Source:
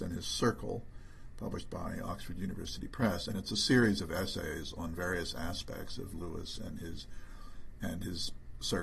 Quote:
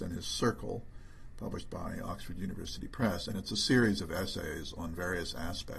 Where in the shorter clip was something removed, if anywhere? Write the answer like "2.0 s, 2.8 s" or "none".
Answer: none